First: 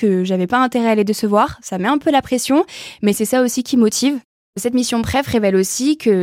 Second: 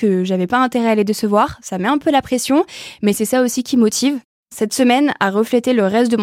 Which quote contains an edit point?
second; 1 cut; at 4.4 s

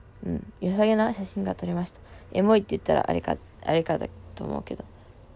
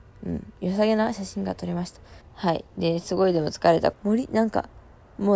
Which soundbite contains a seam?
second; 2 cuts; at 2.2 s, 3.9 s

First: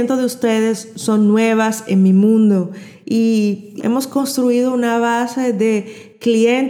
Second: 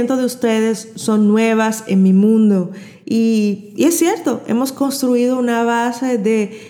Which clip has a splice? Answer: first; 1 cut; at 3.8 s

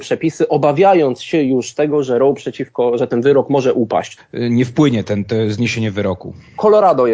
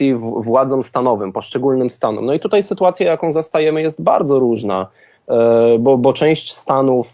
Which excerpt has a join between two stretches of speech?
first; 1 cut; at 4.2 s

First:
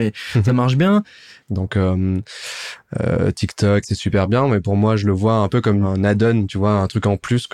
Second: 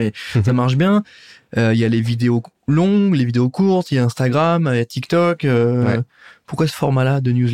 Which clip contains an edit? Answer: first; 2 cuts; at 1.4 s, 3.8 s

